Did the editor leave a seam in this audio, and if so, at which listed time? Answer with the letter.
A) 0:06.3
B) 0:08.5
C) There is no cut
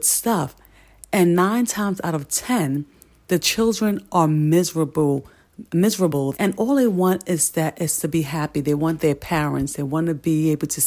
A